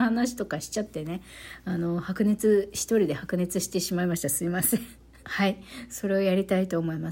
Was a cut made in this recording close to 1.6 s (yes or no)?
no